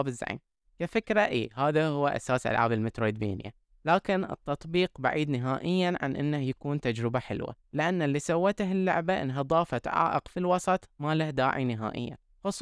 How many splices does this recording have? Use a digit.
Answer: 1